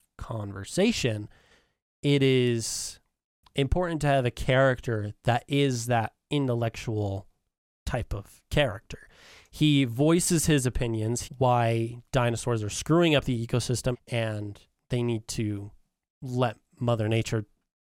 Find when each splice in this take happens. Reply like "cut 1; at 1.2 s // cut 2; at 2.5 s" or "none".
cut 1; at 11.2 s // cut 2; at 13.9 s